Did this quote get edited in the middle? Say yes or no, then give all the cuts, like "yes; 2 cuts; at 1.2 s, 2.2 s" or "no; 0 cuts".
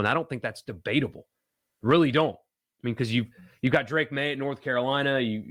no; 0 cuts